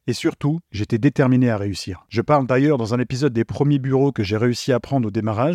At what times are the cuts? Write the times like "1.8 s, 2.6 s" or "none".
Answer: 2.1 s